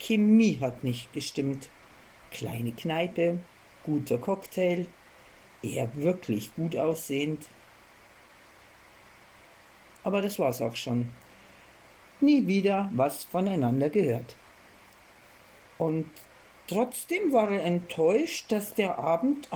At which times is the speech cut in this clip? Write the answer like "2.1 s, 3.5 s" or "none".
2.2 s, 12.0 s, 15.6 s